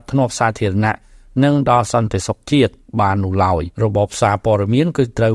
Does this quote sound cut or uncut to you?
cut